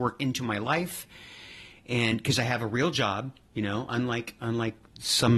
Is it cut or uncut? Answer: uncut